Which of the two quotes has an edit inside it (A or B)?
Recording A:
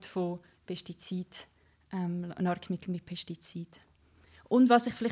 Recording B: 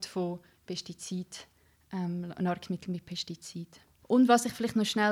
B